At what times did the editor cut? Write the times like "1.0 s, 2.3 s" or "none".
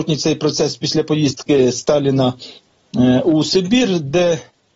none